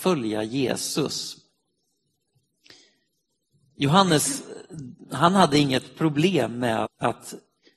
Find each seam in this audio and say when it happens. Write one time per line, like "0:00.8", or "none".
0:06.9